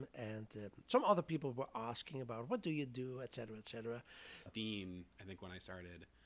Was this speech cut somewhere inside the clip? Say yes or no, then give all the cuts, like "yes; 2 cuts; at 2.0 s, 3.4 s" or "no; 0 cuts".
yes; 1 cut; at 4.5 s